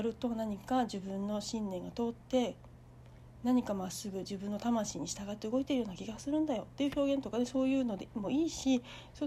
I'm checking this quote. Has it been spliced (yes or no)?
no